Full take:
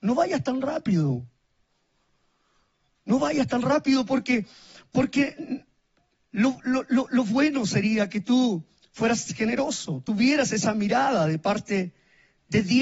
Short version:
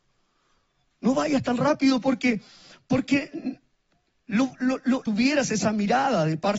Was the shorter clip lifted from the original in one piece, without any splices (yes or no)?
no